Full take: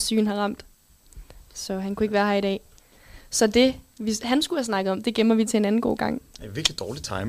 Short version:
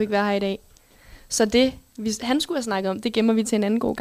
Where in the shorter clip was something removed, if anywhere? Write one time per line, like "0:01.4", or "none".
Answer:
none